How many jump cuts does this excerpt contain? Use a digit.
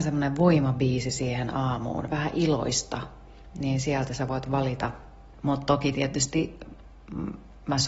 2